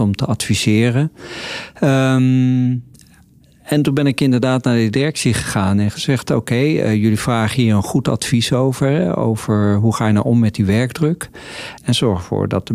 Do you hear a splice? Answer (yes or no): yes